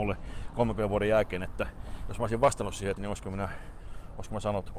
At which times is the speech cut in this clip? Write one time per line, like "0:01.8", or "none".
0:03.0